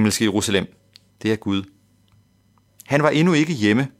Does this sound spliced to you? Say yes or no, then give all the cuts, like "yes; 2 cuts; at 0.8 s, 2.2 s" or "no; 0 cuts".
yes; 1 cut; at 2.7 s